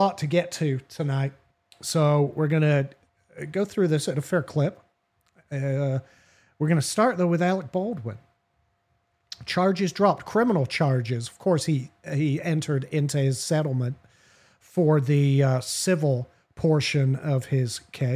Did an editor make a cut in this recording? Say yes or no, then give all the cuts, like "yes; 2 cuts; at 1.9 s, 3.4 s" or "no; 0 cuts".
no; 0 cuts